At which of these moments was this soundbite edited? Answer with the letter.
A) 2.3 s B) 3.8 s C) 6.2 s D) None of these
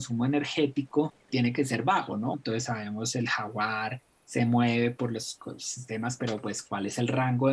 A